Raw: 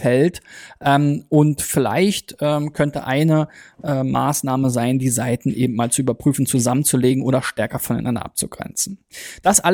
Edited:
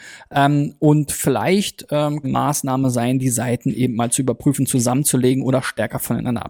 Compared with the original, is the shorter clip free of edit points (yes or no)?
no